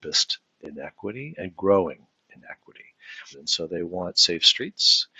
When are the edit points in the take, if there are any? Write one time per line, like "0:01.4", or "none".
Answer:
0:03.3

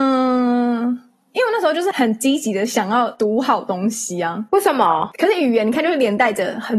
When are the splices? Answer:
0:05.1

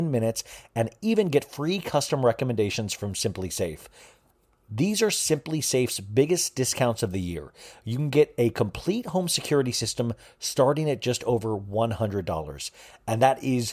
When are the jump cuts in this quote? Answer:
none

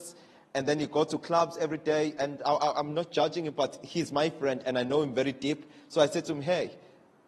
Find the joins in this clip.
none

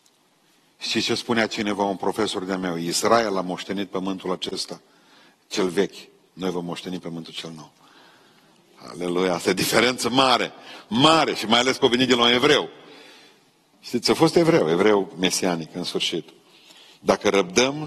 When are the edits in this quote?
none

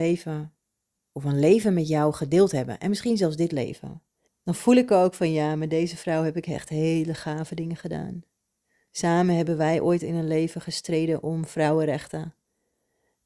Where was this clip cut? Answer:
0:04.3

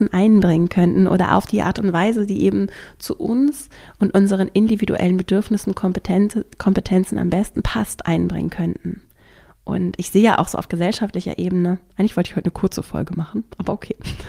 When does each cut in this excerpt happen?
none

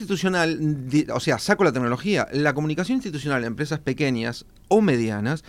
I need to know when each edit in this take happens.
none

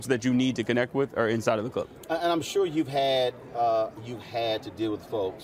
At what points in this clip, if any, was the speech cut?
none

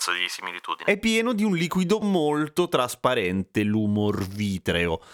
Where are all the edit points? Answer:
0:02.0

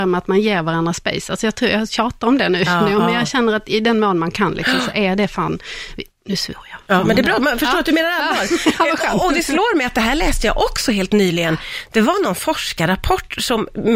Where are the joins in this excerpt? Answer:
none

